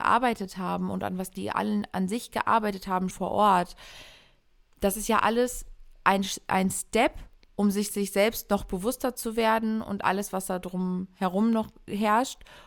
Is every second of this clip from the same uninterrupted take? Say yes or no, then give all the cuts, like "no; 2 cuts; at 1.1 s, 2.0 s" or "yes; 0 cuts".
no; 1 cut; at 3.1 s